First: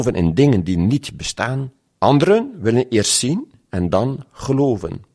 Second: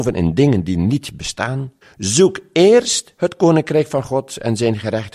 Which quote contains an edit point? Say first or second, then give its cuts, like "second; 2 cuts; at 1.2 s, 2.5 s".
second; 1 cut; at 1.8 s